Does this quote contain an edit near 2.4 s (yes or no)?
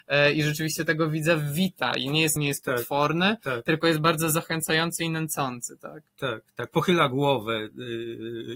yes